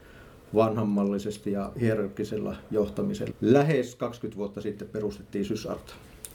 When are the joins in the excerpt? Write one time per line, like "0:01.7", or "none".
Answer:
0:03.3